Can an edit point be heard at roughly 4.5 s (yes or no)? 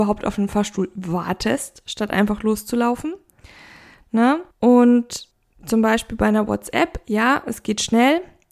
yes